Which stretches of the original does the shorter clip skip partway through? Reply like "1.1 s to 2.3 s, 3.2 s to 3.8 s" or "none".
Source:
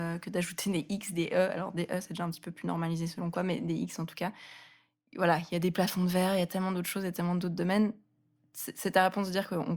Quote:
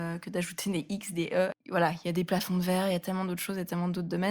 1.5 s to 5.0 s